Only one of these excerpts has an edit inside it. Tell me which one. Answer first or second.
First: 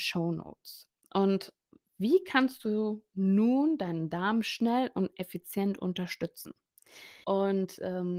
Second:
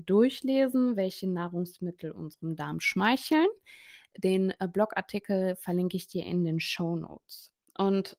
first